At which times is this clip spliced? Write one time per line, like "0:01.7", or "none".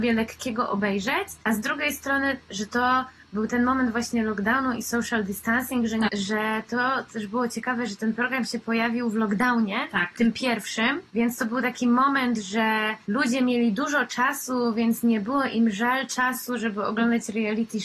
0:06.1